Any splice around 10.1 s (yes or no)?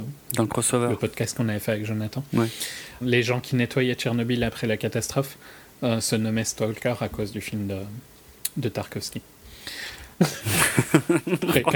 yes